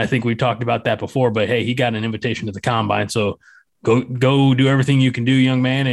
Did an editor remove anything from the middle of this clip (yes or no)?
no